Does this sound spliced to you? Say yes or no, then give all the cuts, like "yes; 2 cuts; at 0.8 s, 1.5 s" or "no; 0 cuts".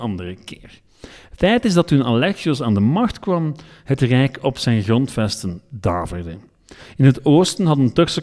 no; 0 cuts